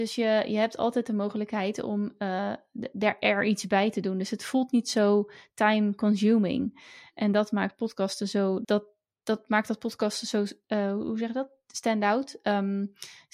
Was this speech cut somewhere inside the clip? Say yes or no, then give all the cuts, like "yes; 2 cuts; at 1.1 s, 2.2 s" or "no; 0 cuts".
yes; 1 cut; at 8.6 s